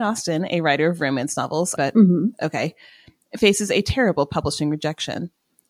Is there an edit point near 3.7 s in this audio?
no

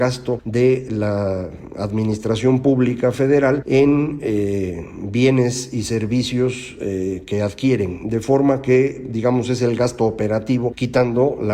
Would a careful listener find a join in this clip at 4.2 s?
no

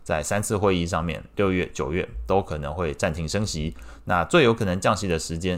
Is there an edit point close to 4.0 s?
no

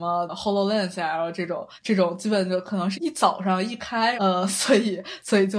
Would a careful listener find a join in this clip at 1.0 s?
no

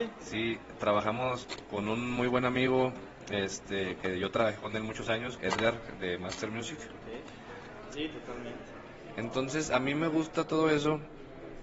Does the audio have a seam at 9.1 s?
no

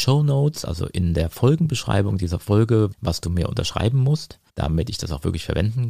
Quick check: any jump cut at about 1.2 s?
no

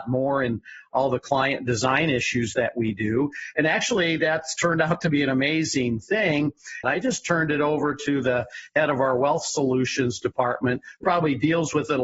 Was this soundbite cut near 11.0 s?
yes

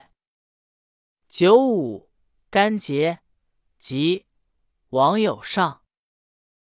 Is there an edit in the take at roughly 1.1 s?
yes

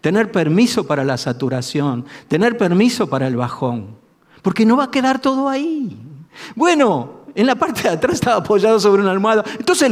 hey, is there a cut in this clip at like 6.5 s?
no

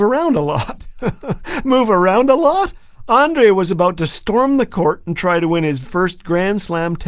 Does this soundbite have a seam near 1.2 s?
no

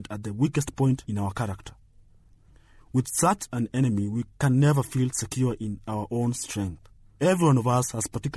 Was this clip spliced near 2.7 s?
no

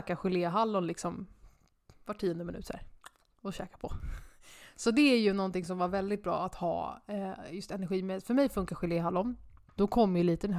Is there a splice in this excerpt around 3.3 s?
no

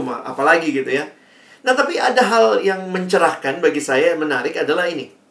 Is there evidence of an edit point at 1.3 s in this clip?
no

